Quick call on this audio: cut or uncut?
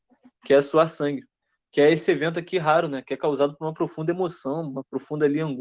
uncut